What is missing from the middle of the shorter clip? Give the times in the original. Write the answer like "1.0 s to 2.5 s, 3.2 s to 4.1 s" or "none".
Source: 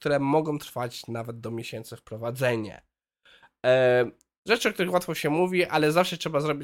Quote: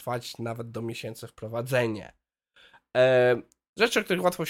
none